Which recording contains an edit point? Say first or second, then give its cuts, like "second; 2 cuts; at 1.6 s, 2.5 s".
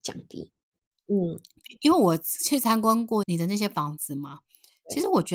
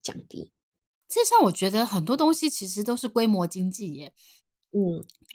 first; 2 cuts; at 0.9 s, 3.2 s